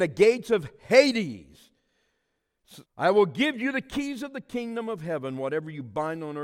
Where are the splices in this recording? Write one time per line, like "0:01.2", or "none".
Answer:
0:02.9

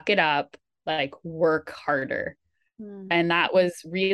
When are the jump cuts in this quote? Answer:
none

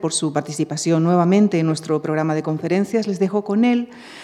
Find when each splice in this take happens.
none

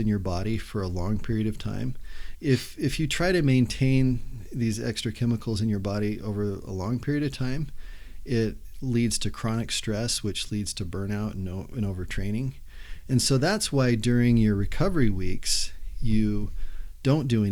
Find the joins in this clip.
0:02.3

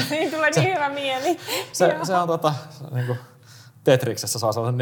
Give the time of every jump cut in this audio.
none

